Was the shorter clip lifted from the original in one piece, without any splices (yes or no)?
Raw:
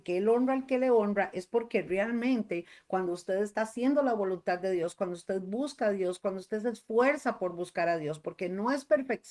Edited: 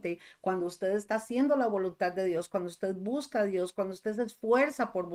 yes